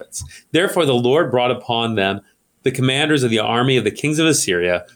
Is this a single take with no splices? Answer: yes; 0 cuts

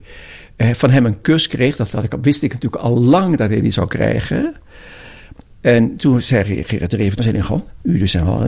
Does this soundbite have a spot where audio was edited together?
yes; 2 cuts; at 5.5 s, 7.2 s

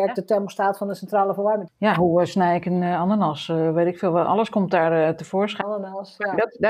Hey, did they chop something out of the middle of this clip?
yes; 2 cuts; at 1.7 s, 5.6 s

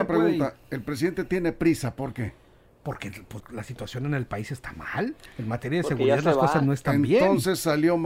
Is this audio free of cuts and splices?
no; 1 cut; at 3.4 s

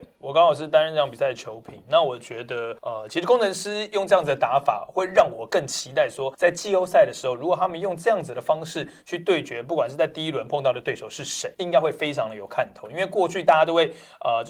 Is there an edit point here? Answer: no; 0 cuts

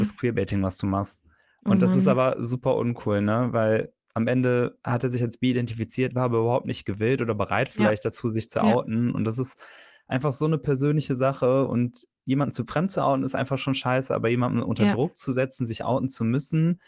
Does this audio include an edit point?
no; 0 cuts

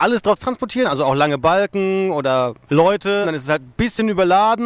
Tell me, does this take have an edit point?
yes; 1 cut; at 3.2 s

